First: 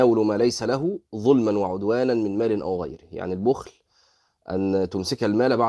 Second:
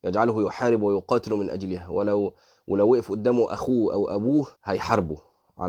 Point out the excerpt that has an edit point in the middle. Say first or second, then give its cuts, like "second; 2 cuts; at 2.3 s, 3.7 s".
second; 1 cut; at 4.6 s